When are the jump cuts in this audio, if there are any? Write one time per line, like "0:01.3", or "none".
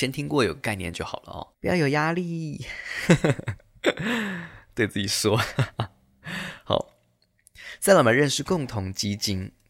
0:01.5

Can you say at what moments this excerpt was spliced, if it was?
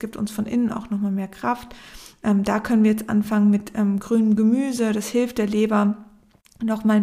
none

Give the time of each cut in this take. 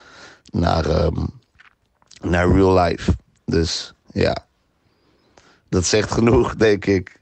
none

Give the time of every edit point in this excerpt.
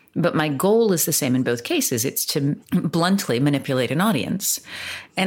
0:02.6

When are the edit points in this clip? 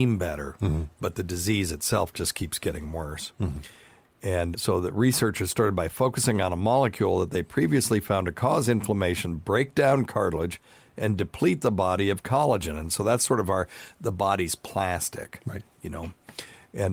0:04.5

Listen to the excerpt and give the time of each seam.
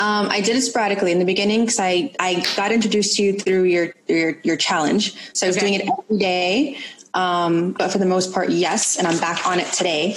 0:07.8

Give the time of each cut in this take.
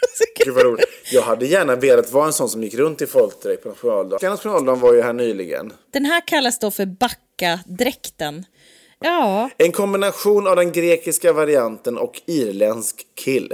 0:04.2
0:09.0

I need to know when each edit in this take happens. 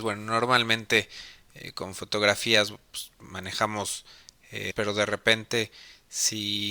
0:04.7

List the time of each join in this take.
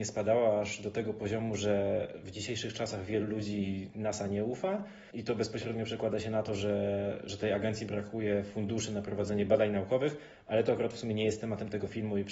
none

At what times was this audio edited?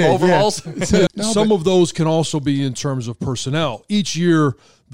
0:01.1

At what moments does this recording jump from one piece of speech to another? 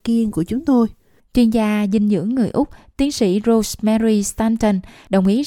0:01.2

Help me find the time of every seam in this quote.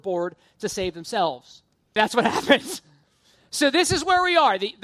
0:02.0

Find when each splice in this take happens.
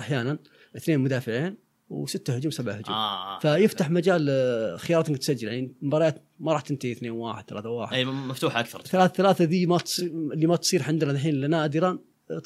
none

